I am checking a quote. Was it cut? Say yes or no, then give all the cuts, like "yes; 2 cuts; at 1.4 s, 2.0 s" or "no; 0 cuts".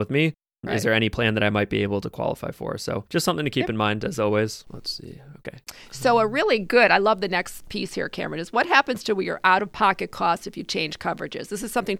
no; 0 cuts